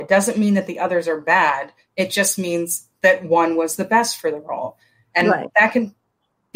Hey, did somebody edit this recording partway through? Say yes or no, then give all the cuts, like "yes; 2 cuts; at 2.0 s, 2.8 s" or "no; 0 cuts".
no; 0 cuts